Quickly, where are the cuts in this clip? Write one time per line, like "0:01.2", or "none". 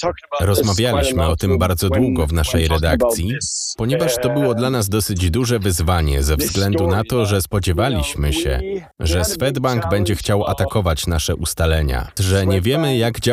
0:08.9
0:12.2